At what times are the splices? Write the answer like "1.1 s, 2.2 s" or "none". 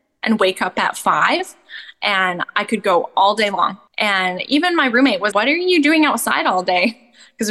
3.9 s, 5.3 s